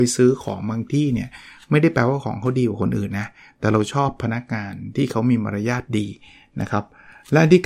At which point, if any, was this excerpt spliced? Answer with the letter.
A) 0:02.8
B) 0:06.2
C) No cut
C